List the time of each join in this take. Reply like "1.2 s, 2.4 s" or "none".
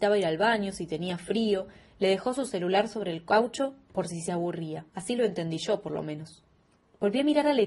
4.9 s